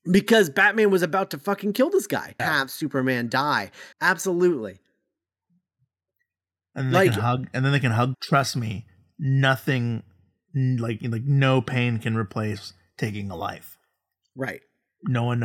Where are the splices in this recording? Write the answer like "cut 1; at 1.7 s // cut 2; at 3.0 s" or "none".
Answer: cut 1; at 2.4 s // cut 2; at 3.9 s // cut 3; at 8.1 s